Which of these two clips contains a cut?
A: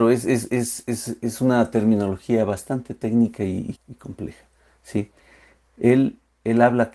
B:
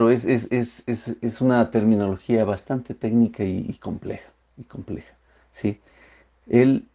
A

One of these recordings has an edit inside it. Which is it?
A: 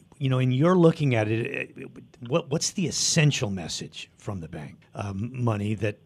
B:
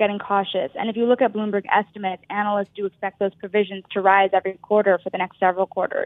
A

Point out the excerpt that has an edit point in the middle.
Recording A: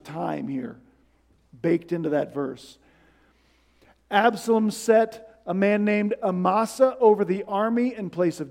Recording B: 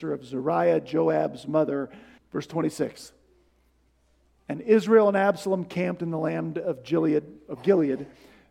B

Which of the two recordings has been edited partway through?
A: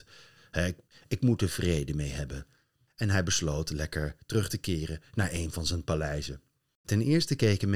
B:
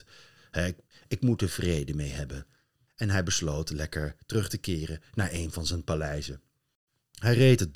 A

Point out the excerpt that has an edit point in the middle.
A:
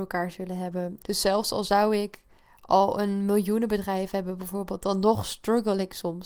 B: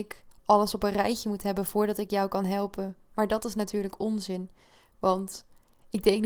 A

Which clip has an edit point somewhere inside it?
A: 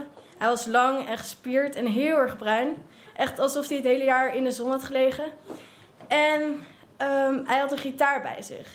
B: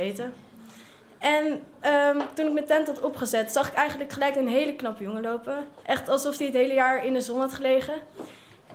B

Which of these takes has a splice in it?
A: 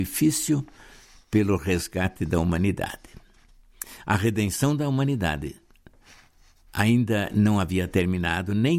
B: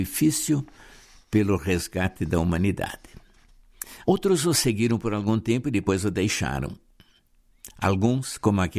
B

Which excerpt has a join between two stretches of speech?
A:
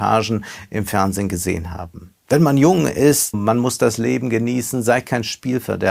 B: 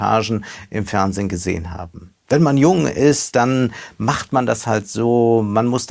A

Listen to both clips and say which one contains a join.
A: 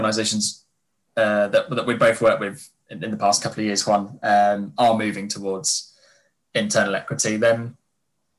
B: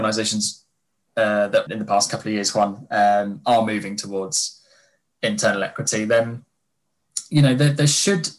B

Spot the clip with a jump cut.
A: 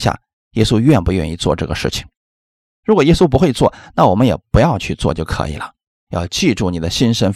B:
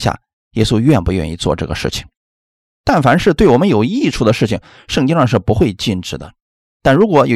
A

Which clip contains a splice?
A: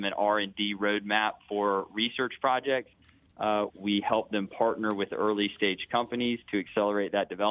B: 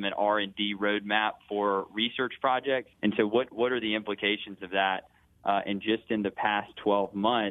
B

